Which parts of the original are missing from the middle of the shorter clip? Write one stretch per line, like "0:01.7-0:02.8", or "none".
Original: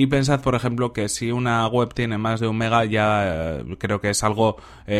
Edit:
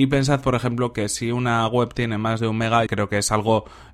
0:02.9-0:03.8